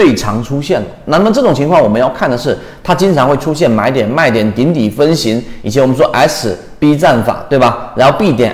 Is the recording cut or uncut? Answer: uncut